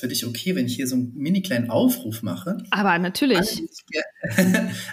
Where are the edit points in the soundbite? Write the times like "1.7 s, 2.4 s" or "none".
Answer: none